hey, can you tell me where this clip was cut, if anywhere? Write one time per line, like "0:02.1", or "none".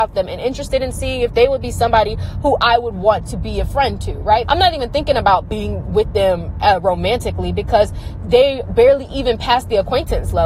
0:04.4

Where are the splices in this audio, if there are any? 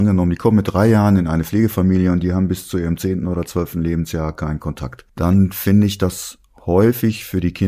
none

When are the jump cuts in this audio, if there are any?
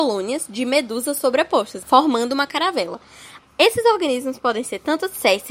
0:01.8
0:03.4

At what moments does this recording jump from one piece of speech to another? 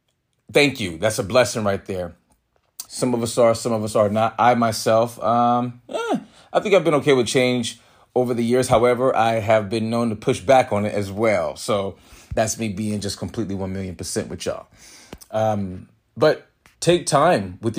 0:02.9

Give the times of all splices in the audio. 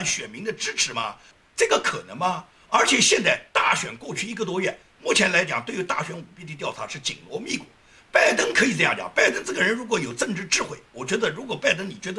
none

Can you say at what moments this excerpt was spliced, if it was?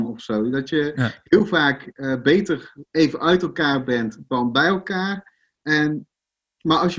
0:02.9

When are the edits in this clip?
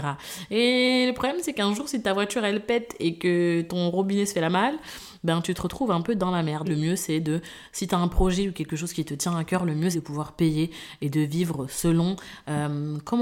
0:06.6
0:09.9

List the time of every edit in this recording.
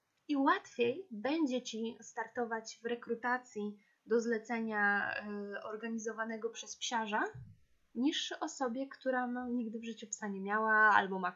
none

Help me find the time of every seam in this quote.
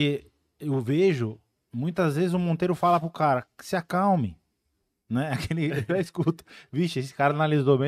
none

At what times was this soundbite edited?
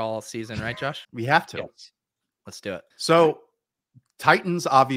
0:01.0
0:02.9

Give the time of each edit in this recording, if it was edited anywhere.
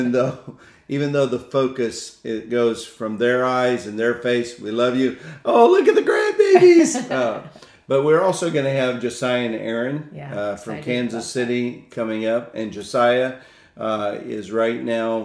none

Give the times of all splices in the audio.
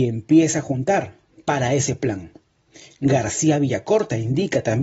none

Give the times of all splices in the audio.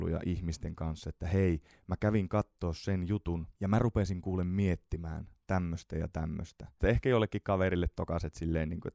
0:03.5
0:06.8

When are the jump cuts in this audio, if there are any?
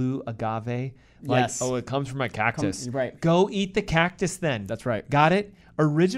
none

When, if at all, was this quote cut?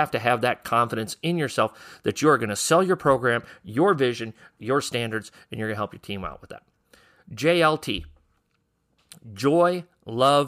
none

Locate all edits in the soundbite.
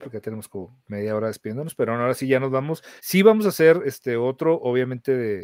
0:03.0

